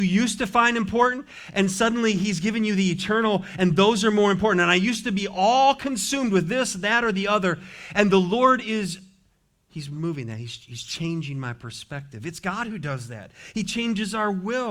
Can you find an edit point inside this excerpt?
no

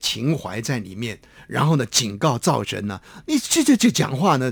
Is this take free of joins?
yes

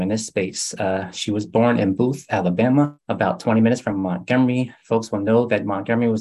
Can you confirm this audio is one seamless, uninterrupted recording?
yes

